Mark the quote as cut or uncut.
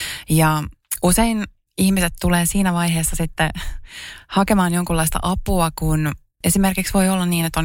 uncut